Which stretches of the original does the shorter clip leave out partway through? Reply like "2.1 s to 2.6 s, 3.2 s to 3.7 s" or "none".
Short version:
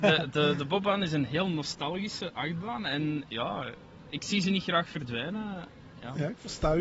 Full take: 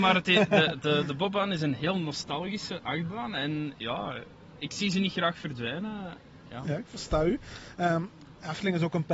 none